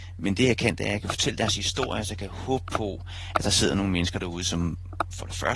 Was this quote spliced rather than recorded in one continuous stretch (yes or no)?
no